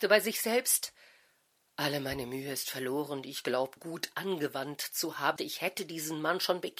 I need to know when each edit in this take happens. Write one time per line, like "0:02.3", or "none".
0:03.8
0:05.4